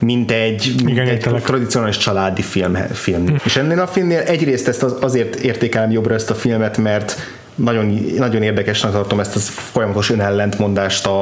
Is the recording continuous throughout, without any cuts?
no; 1 cut; at 3.4 s

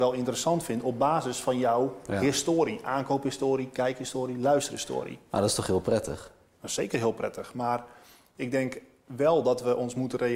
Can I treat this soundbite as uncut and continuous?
yes; 0 cuts

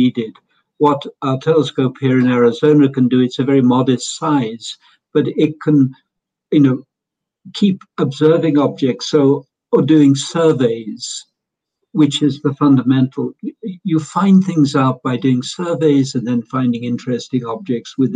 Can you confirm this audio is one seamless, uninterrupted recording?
yes; 0 cuts

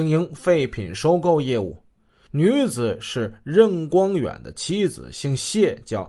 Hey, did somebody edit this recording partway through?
no; 0 cuts

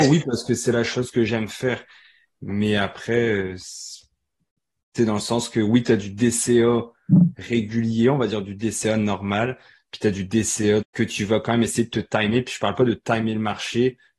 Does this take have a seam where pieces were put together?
yes; 1 cut; at 10.8 s

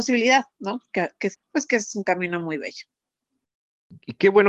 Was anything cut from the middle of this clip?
yes; 1 cut; at 1.3 s

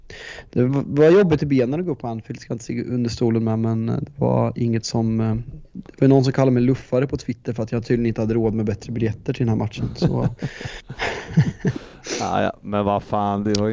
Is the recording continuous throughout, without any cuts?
yes; 0 cuts

